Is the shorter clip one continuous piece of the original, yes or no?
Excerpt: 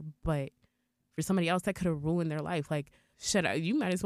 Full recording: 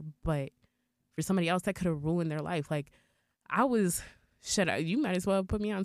no